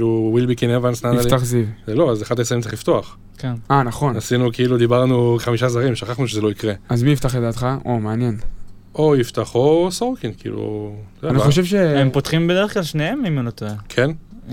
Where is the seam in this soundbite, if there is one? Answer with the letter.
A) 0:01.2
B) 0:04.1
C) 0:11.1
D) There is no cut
C